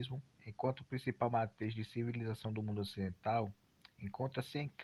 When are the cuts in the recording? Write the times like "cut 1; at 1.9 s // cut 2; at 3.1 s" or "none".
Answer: none